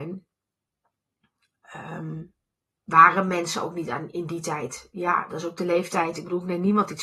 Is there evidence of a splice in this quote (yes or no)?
yes